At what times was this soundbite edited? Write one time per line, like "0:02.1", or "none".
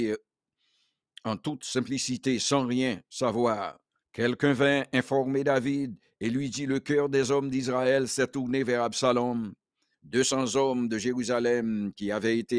0:04.0
0:09.9

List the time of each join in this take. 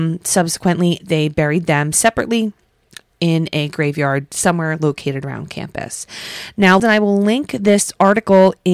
0:01.0
0:06.8

